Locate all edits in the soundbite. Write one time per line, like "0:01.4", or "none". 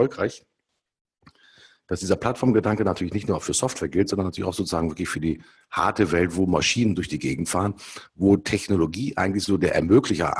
none